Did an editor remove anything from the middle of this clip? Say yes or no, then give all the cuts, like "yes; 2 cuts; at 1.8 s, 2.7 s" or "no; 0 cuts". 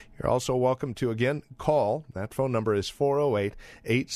no; 0 cuts